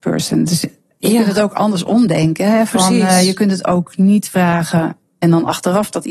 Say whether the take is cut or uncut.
uncut